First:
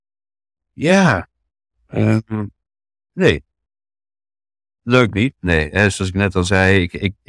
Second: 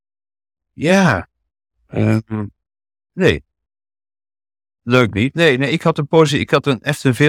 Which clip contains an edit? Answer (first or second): first